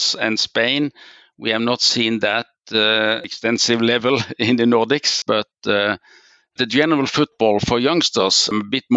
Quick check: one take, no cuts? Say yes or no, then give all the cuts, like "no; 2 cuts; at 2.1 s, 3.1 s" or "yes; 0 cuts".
no; 1 cut; at 5.2 s